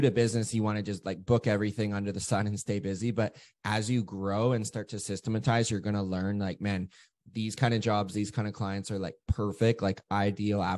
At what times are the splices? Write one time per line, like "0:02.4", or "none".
none